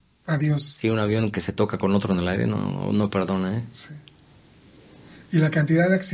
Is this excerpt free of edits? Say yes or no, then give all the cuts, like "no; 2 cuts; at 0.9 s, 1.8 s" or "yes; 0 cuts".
yes; 0 cuts